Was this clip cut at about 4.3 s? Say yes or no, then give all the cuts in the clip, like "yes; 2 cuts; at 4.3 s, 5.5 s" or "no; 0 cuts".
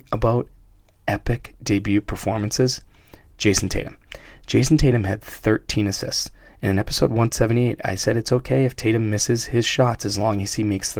no; 0 cuts